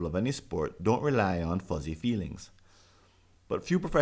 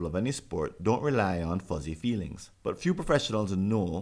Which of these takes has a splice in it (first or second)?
second